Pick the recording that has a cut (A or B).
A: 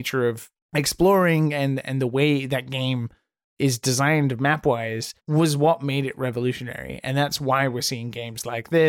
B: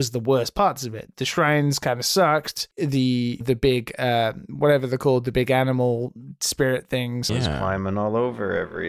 B